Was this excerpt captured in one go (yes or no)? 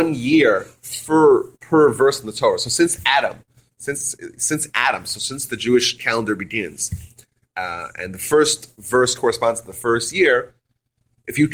yes